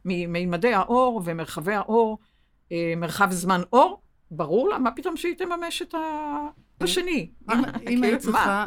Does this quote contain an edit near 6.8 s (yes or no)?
yes